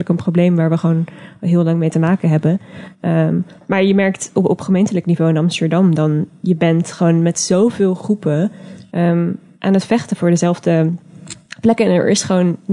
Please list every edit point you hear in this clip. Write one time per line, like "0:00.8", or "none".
0:08.9

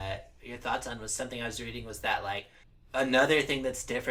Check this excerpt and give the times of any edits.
none

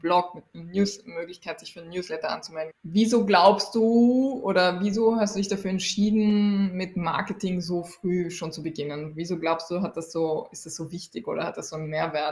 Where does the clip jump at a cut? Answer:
0:02.7

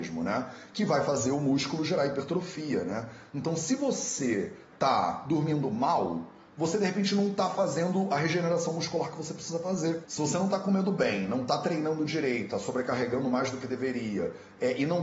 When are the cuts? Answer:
none

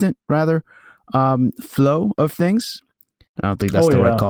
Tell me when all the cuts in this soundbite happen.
0:03.3

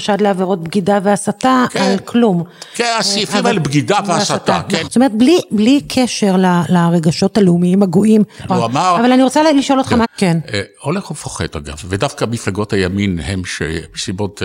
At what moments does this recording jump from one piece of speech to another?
0:04.9
0:08.5
0:10.0

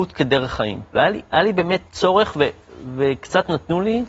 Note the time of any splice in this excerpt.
0:00.9

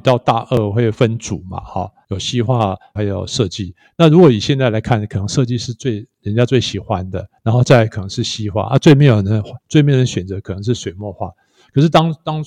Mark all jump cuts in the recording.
0:03.0
0:09.6

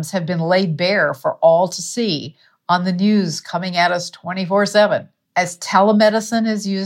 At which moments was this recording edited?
0:05.2

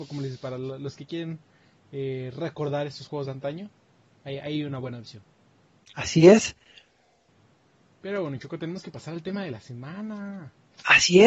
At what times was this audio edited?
none

